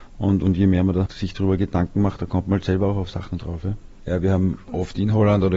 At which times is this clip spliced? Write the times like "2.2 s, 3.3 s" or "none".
1.1 s, 4.0 s